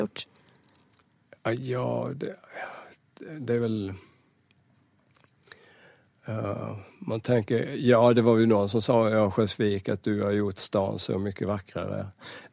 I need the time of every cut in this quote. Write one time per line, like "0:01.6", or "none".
none